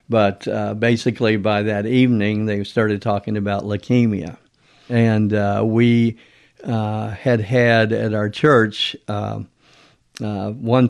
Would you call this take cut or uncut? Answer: uncut